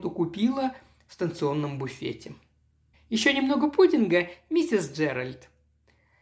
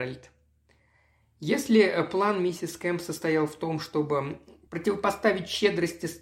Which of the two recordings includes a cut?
first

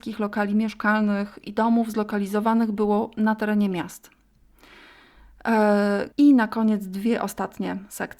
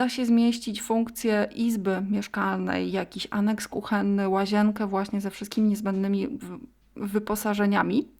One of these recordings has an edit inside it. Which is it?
first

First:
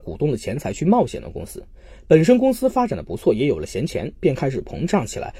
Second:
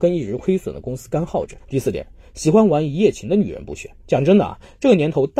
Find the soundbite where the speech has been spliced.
second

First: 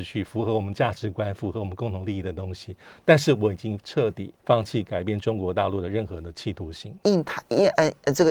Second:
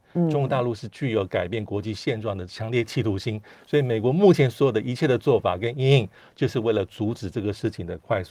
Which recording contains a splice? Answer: first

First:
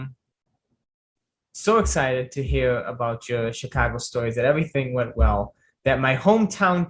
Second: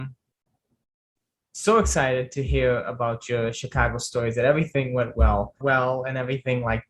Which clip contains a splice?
second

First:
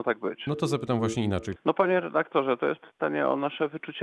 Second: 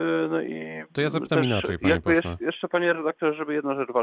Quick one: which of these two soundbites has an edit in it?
first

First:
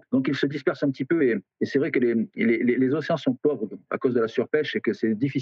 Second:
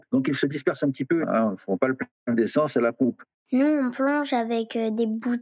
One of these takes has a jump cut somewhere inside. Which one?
second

